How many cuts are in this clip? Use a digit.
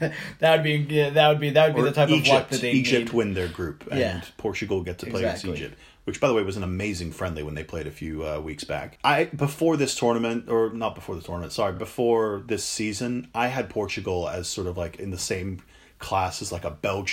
0